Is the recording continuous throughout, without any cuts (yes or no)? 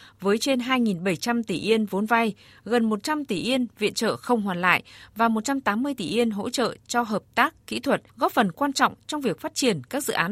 no